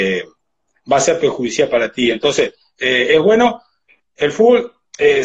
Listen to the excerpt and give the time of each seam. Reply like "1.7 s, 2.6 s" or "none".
none